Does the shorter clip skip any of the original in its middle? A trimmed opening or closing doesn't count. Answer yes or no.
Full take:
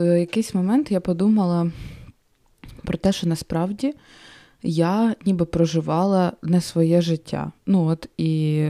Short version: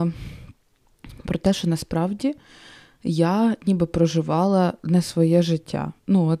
no